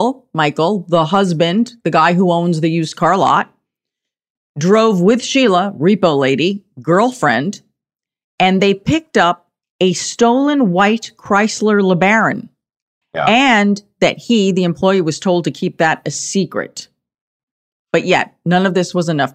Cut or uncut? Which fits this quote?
cut